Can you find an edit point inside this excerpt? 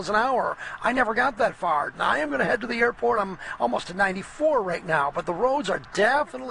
yes; 2 cuts; at 1.9 s, 3.2 s

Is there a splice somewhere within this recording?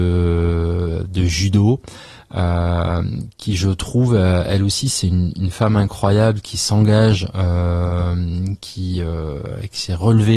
no; 0 cuts

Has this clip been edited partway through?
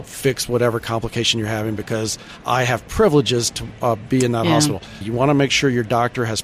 yes; 1 cut; at 5.0 s

